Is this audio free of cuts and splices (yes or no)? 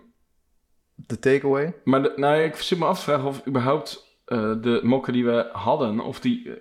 yes